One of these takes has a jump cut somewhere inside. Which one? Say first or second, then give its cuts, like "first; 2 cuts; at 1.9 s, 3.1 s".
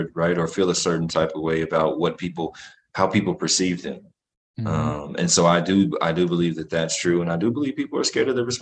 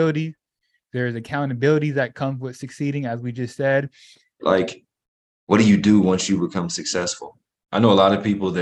second; 2 cuts; at 4.4 s, 7.7 s